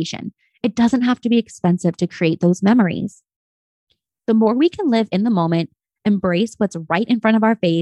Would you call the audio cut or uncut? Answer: uncut